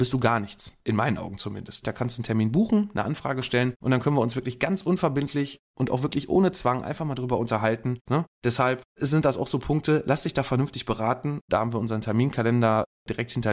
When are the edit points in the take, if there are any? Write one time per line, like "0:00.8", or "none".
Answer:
0:01.8
0:08.1
0:11.4